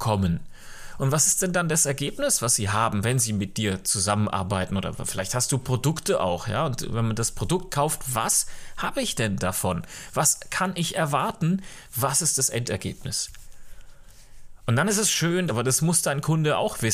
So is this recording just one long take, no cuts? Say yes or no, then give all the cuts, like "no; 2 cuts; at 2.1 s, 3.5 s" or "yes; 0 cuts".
no; 1 cut; at 15.5 s